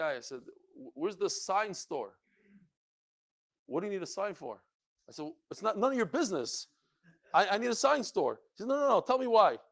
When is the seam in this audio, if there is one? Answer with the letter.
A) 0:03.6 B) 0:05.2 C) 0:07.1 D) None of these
A